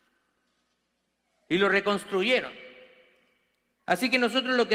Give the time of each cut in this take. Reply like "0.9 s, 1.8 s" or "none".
3.8 s